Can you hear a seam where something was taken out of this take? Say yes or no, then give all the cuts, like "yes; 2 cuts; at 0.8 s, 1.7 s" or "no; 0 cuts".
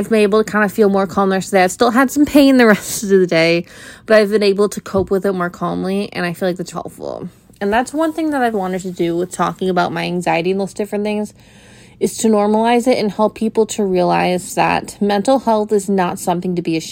yes; 2 cuts; at 6.7 s, 8.5 s